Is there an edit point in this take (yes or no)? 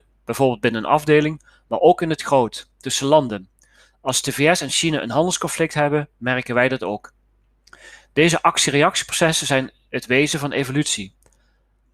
no